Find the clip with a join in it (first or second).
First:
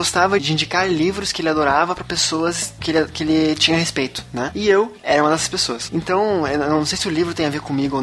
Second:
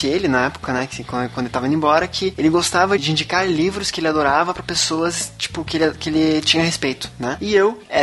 first